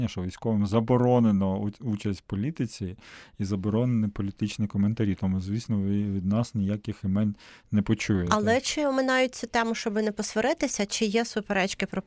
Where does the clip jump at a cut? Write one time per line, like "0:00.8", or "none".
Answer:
none